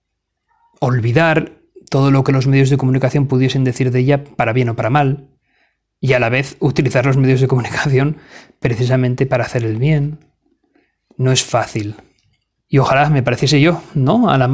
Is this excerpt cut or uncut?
cut